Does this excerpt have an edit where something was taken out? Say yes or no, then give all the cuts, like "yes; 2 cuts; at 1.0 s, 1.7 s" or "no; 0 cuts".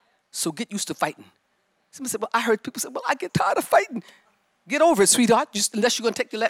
yes; 1 cut; at 3.3 s